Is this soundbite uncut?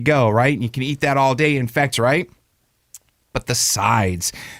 no; 1 cut; at 1.9 s

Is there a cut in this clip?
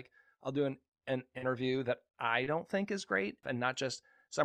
yes; 1 cut; at 3.4 s

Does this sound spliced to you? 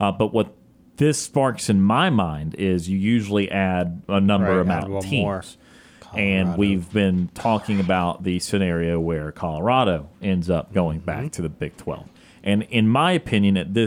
yes; 1 cut; at 4.0 s

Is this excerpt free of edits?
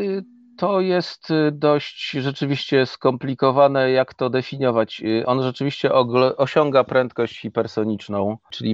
yes; 0 cuts

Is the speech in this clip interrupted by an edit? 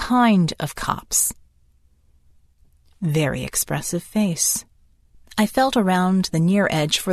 yes; 1 cut; at 5.1 s

